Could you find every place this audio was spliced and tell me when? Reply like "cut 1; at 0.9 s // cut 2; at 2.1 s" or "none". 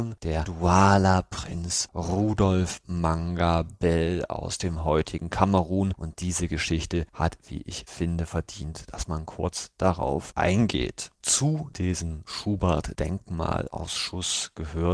cut 1; at 11.1 s